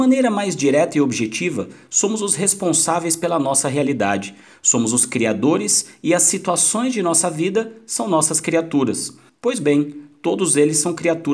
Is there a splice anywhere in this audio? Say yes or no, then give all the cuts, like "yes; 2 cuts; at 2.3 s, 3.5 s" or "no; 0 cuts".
yes; 1 cut; at 9.3 s